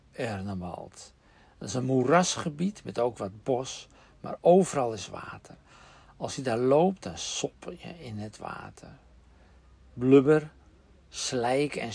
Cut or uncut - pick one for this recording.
uncut